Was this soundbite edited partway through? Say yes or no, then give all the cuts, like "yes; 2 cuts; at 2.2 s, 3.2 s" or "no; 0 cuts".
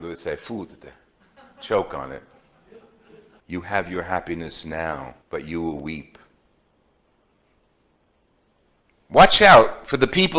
yes; 2 cuts; at 3.4 s, 5.2 s